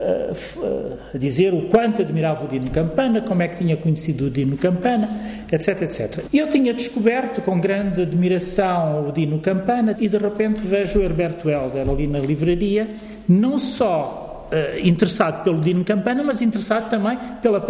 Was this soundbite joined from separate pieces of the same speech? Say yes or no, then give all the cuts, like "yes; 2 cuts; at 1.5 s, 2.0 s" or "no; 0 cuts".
yes; 2 cuts; at 6.3 s, 10.0 s